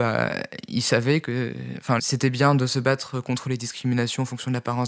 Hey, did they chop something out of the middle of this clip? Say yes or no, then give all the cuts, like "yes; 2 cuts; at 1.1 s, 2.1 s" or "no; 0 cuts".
yes; 1 cut; at 2.0 s